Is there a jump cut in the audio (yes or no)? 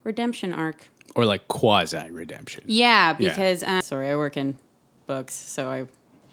yes